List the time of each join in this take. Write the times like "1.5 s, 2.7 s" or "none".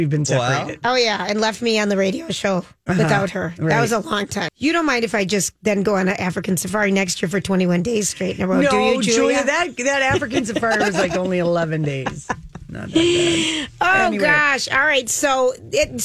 4.5 s